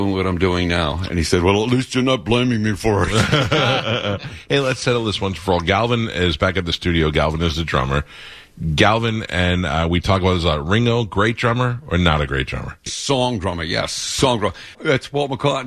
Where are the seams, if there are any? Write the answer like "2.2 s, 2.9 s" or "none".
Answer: 12.9 s, 14.7 s